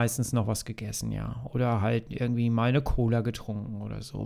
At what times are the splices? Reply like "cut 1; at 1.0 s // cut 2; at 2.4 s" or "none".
none